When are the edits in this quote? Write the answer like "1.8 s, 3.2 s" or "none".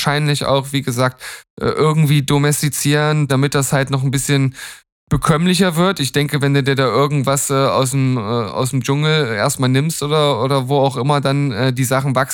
1.5 s, 3.3 s